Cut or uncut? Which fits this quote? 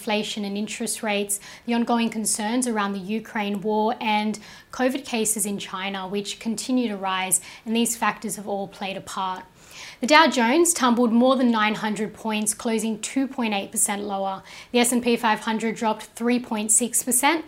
uncut